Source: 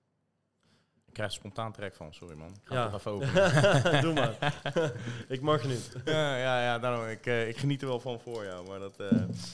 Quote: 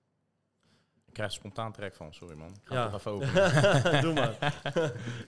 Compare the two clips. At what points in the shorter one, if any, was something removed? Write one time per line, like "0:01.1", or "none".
none